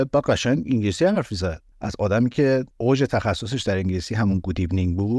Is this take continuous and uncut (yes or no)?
no